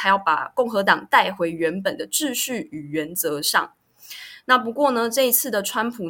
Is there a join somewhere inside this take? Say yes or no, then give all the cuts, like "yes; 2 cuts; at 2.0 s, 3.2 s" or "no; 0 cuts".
no; 0 cuts